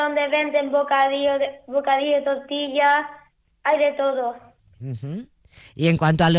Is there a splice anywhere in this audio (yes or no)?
no